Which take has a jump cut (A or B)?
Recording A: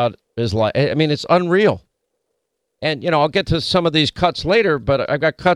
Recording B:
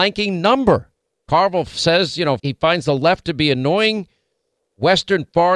B